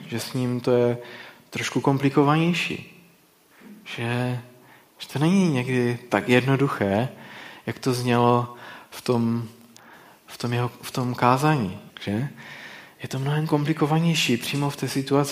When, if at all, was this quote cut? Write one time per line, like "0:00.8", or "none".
0:11.9